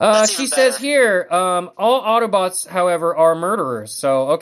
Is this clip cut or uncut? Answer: uncut